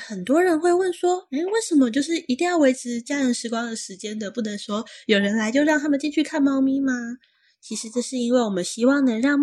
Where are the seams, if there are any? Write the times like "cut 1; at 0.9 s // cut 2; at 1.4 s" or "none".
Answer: none